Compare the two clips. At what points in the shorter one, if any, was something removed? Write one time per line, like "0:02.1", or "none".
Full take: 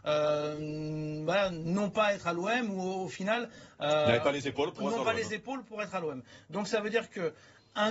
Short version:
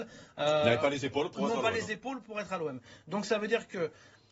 none